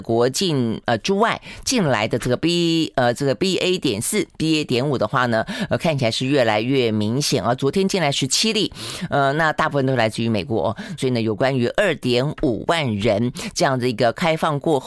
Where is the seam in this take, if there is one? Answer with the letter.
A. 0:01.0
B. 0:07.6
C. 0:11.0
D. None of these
C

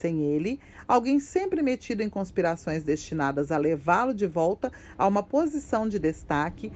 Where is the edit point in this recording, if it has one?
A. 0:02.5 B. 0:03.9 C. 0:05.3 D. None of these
D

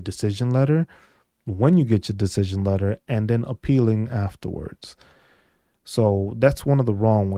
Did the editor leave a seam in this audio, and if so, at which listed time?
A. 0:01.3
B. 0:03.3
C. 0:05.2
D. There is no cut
D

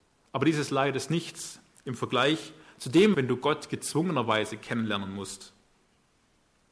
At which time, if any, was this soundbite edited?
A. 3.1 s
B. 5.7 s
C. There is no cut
A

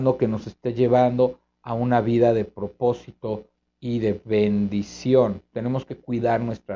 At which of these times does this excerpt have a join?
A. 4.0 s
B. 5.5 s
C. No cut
B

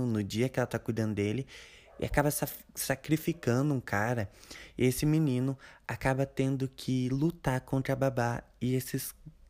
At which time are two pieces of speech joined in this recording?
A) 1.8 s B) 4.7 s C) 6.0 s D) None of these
D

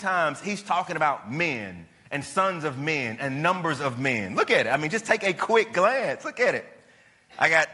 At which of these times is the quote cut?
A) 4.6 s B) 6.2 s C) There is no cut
C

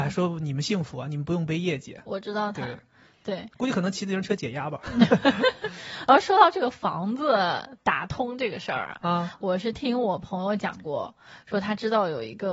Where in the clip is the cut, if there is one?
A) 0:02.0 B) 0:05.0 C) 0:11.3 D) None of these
D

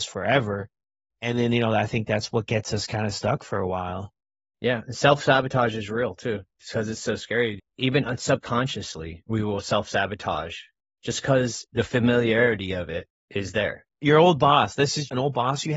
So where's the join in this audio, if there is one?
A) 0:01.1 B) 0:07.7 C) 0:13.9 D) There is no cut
C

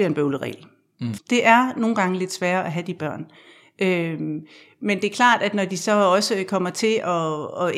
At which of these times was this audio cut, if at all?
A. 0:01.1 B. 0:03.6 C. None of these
A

